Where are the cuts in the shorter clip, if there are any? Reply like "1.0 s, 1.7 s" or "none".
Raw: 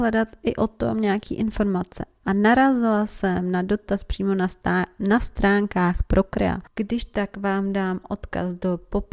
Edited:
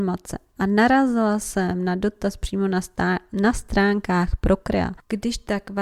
none